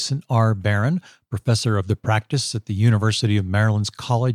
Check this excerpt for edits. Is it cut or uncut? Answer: uncut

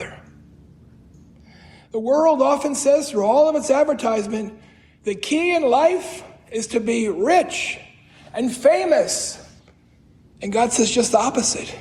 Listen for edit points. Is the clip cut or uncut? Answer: uncut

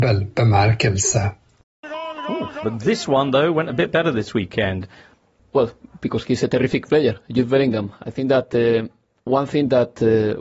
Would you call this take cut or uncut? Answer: cut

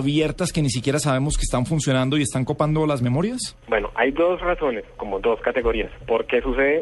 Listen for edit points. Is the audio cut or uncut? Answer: cut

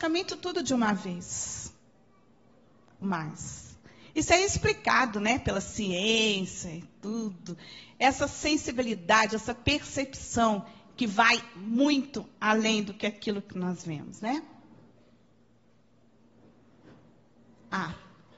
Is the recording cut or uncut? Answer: cut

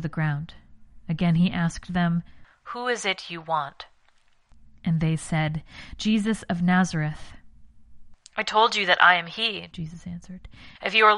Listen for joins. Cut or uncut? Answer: uncut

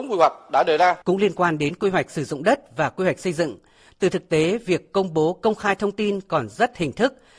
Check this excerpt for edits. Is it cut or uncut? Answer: cut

